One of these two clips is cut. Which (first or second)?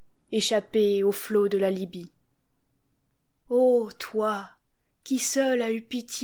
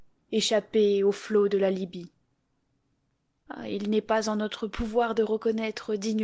second